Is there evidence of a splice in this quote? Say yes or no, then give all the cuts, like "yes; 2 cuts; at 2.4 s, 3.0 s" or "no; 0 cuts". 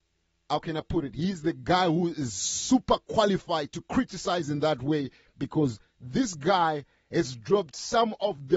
no; 0 cuts